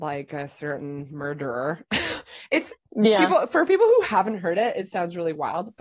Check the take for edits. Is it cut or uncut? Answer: uncut